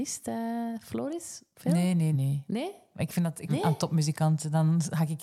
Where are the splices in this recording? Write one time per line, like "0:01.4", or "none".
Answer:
0:02.1
0:03.5